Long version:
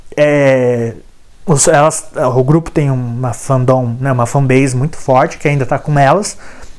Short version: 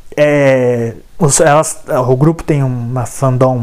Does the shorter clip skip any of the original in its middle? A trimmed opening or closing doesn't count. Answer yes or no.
yes